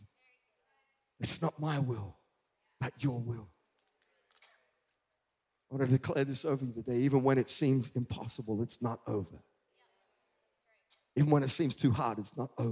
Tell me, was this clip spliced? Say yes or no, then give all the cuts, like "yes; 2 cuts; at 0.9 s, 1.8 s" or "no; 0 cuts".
no; 0 cuts